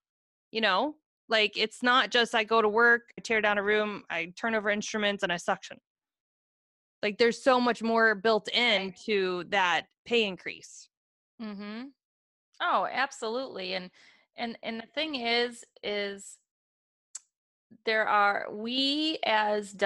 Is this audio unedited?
no; 1 cut; at 3.2 s

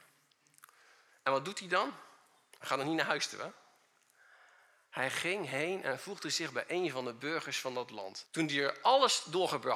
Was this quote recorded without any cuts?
no; 1 cut; at 8.3 s

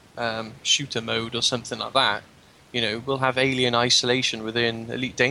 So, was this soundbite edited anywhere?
no; 0 cuts

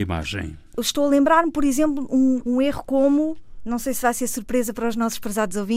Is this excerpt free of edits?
no; 1 cut; at 2.4 s

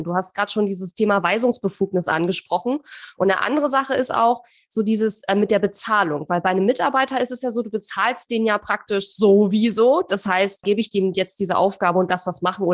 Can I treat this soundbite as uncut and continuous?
no; 2 cuts; at 3.2 s, 10.6 s

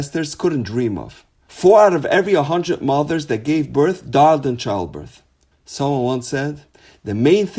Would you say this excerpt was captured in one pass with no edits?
no; 2 cuts; at 1.5 s, 5.5 s

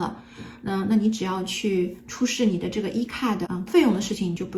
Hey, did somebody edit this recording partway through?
yes; 1 cut; at 3.7 s

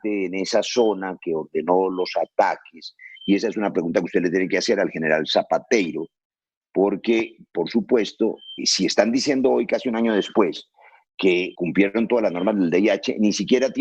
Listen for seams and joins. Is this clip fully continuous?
no; 2 cuts; at 8.6 s, 11.5 s

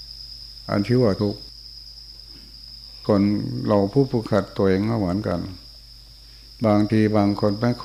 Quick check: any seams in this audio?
no; 0 cuts

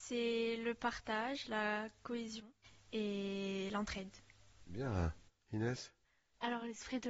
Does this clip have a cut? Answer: no; 0 cuts

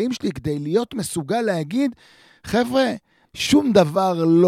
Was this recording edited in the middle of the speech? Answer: yes; 1 cut; at 3.2 s

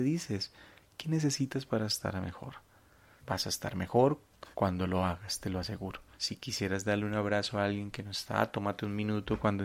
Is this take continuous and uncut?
no; 3 cuts; at 3.2 s, 4.5 s, 6.1 s

